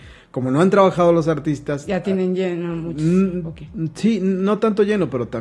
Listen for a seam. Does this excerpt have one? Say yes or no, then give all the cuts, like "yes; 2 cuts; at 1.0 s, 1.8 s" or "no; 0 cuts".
no; 0 cuts